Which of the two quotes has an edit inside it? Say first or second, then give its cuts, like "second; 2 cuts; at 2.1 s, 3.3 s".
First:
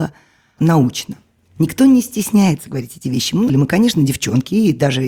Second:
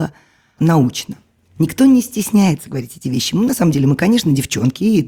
first; 1 cut; at 3.5 s